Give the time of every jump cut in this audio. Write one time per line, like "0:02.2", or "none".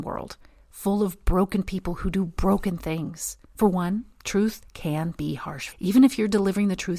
0:03.4
0:05.7